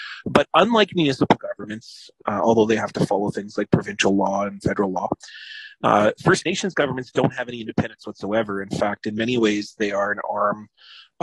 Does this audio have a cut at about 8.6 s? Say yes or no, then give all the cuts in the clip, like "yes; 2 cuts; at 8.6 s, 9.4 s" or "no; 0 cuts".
no; 1 cut; at 2.2 s